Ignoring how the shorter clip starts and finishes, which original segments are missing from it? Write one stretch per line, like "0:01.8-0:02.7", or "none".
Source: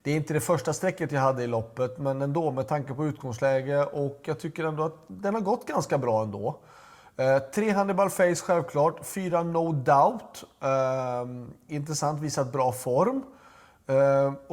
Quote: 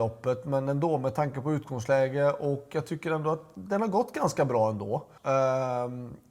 0:06.7-0:10.5